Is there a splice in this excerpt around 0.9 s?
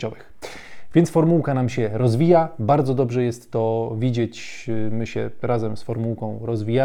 no; 0 cuts

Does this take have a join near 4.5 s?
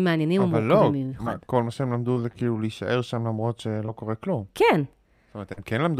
no; 0 cuts

